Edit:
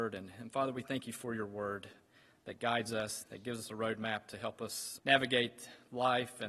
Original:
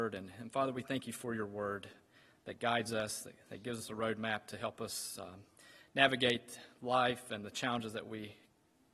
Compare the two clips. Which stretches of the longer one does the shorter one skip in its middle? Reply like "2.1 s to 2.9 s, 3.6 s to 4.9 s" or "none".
3.2 s to 3.4 s, 5.2 s to 5.9 s